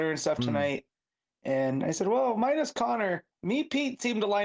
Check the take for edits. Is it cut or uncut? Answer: cut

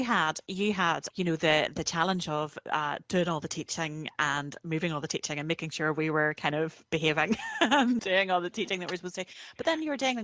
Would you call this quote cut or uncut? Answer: cut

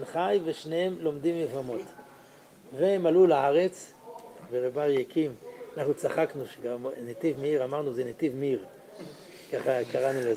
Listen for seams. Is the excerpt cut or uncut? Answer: cut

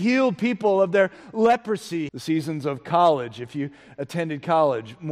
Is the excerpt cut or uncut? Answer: cut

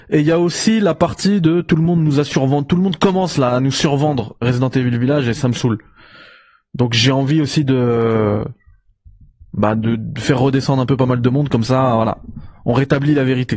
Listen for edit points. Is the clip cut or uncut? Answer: uncut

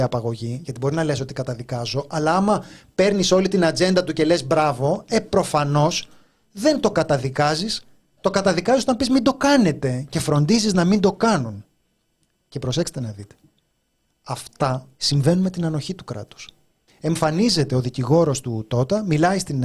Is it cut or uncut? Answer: cut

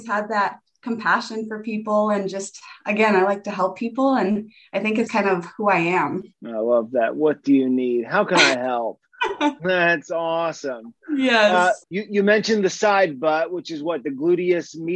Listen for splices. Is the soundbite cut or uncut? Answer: cut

